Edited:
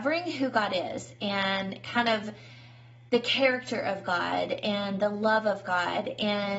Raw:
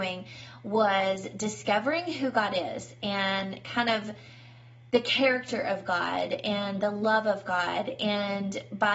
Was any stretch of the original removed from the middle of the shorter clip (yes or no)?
no